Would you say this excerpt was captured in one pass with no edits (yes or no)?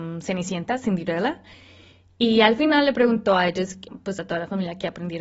no